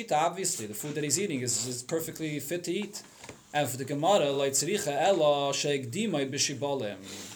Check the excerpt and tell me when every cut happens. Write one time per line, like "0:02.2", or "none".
none